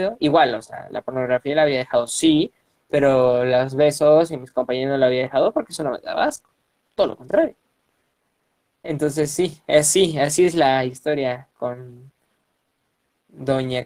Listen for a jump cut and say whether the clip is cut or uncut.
uncut